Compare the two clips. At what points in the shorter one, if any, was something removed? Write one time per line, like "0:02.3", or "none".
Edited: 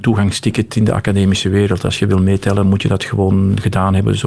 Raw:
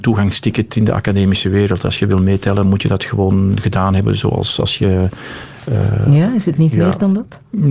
none